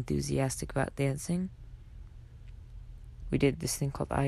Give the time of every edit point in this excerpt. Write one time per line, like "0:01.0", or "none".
0:03.2